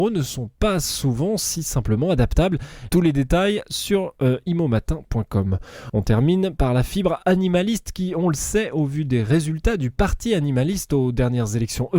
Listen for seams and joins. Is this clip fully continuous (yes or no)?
no